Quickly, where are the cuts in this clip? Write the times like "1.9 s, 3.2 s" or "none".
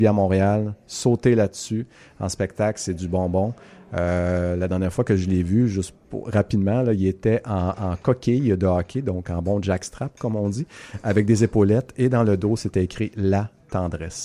6.0 s